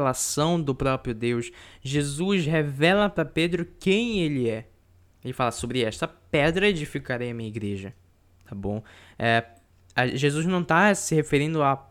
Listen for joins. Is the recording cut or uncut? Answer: cut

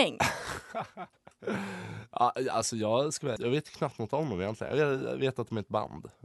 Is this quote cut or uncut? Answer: cut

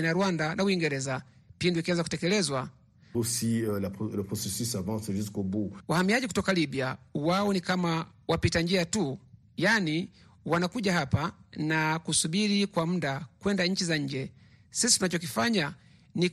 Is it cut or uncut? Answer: cut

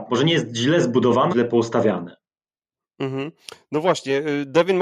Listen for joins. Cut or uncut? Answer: cut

